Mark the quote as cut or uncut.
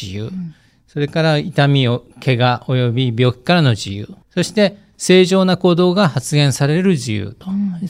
cut